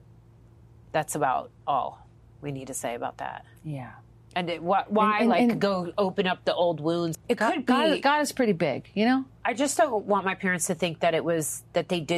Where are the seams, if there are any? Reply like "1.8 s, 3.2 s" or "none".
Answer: 7.1 s, 9.4 s